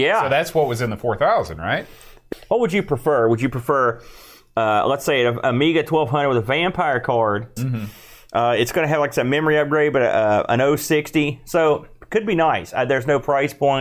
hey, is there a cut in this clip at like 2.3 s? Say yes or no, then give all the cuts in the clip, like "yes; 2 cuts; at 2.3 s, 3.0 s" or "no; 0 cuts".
yes; 2 cuts; at 2.3 s, 7.6 s